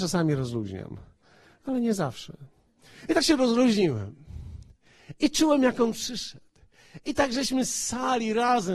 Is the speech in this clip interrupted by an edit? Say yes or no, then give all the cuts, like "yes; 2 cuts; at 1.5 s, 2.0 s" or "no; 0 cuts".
no; 0 cuts